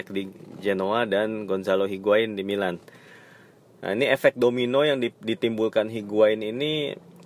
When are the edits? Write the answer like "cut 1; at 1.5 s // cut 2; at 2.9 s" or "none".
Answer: none

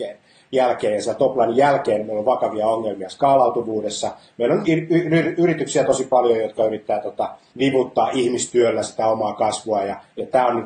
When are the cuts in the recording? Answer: cut 1; at 4.7 s // cut 2; at 7.5 s

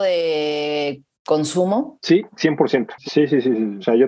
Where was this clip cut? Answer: cut 1; at 3.0 s

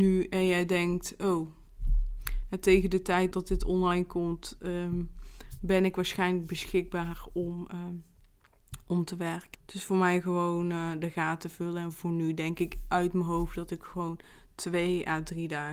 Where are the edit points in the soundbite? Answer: cut 1; at 3.3 s // cut 2; at 9.5 s

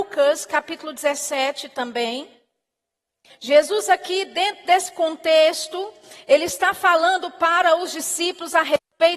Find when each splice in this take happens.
cut 1; at 3.3 s

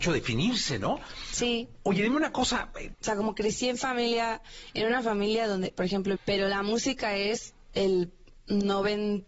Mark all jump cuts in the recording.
cut 1; at 2.9 s // cut 2; at 6.2 s

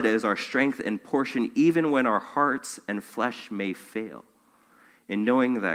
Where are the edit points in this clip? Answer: none

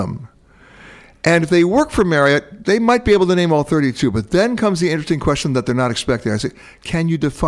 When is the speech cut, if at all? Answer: none

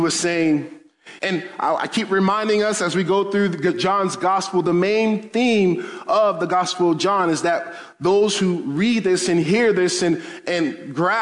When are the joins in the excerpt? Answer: cut 1; at 1.2 s

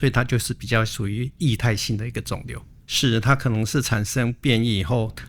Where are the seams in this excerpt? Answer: cut 1; at 2.8 s

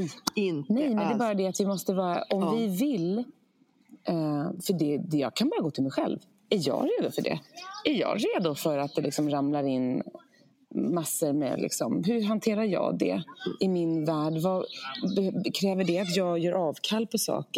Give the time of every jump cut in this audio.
none

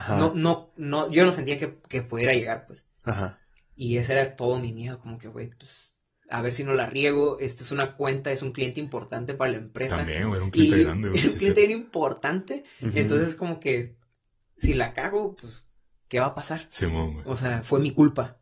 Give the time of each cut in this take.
none

